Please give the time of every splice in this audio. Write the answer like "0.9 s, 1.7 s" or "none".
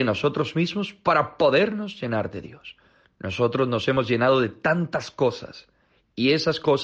3.0 s

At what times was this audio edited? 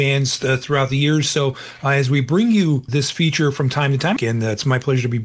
2.9 s, 4.2 s

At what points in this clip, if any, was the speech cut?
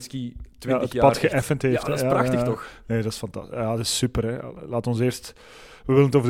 none

